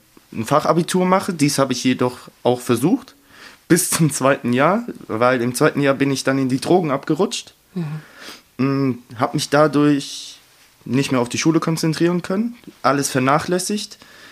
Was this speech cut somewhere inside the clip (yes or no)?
no